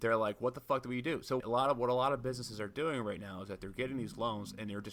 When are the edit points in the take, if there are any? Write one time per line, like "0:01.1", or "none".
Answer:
0:01.4